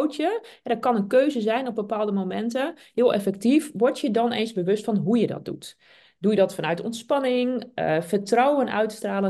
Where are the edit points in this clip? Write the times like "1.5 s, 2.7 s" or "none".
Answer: none